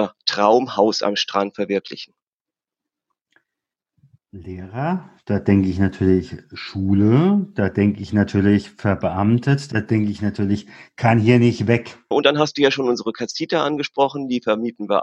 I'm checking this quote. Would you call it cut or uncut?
cut